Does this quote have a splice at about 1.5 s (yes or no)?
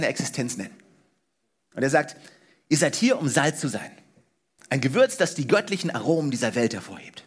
no